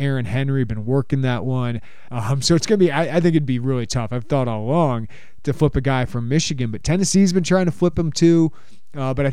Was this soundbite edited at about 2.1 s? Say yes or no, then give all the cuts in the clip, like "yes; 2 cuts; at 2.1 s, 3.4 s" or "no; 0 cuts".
yes; 1 cut; at 2.1 s